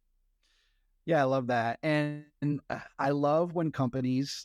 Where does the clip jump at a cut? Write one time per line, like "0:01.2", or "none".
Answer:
none